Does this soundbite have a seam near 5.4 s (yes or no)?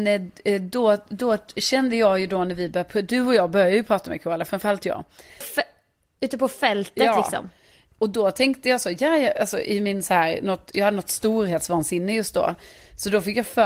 yes